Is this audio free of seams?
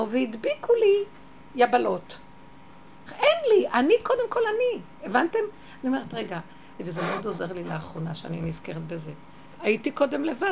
no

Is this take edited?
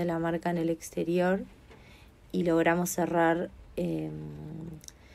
no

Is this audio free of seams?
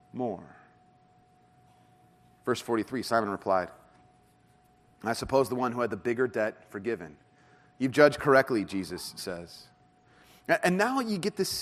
yes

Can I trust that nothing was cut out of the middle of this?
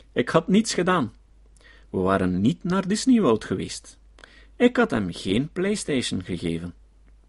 yes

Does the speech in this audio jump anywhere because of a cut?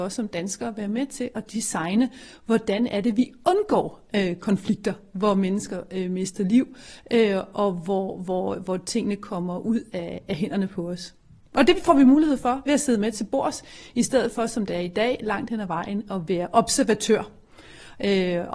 no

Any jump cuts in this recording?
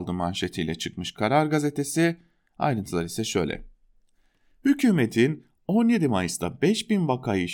no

